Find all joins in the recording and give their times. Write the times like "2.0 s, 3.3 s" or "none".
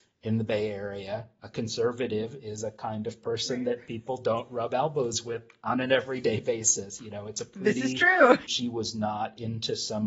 8.5 s